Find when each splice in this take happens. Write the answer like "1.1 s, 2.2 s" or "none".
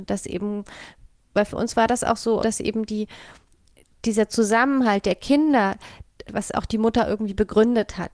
2.4 s, 6.3 s